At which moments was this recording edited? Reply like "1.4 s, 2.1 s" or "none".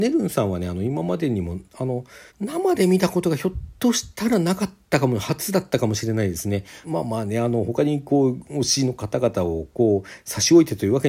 2.3 s, 6.8 s